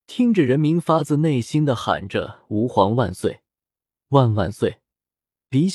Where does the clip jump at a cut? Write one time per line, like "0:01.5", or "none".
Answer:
0:04.0